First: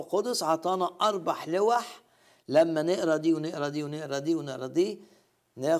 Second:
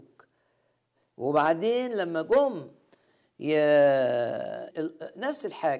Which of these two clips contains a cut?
second; 1 cut; at 4.7 s

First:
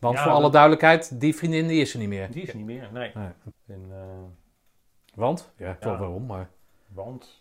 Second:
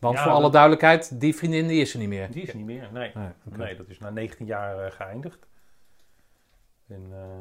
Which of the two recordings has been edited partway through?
first; 2 cuts; at 3.5 s, 5.8 s

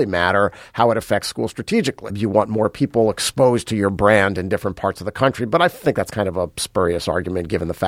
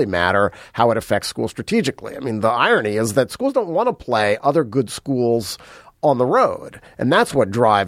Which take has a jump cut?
first; 1 cut; at 2.1 s

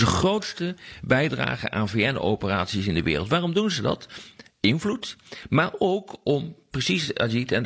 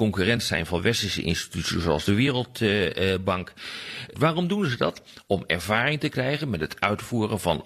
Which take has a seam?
second; 1 cut; at 4.1 s

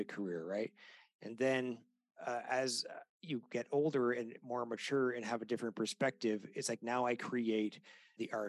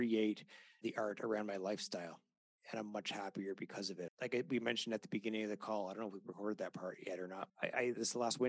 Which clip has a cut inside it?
second; 2 cuts; at 4.1 s, 7.5 s

